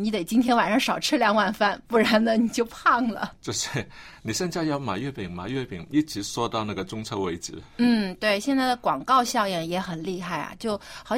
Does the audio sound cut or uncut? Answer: cut